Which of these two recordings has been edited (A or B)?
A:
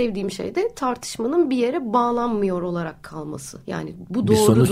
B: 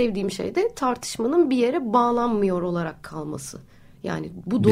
A